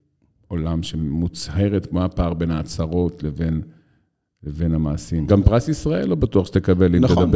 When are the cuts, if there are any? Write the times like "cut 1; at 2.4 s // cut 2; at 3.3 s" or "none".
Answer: cut 1; at 5.3 s